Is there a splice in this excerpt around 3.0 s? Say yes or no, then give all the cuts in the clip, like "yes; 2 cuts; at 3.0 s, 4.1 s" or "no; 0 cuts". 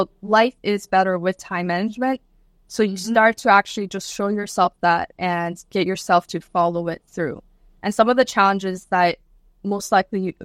no; 0 cuts